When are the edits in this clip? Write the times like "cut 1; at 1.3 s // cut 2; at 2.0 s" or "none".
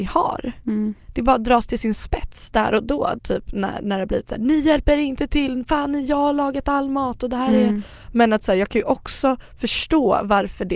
cut 1; at 3.2 s